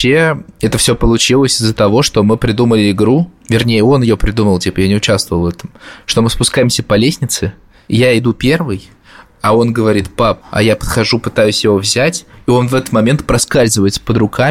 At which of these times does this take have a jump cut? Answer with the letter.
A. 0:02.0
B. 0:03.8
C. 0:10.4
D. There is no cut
C